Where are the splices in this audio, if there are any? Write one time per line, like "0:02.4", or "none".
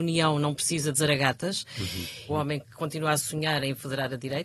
0:02.3

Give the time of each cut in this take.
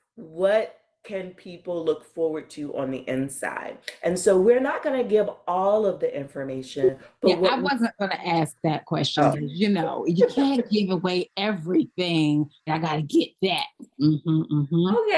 0:09.3
0:12.7

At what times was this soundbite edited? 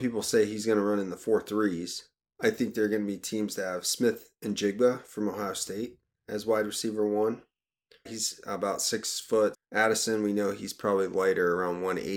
0:02.4
0:08.1
0:09.5

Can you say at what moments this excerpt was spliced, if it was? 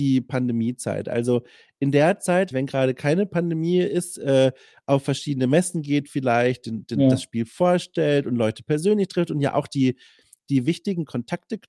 0:02.5

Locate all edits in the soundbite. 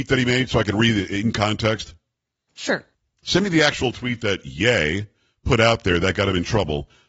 none

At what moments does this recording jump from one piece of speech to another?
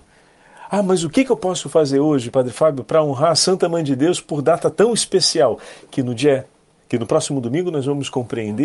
none

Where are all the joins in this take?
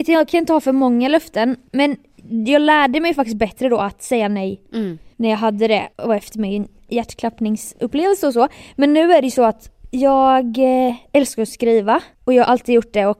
none

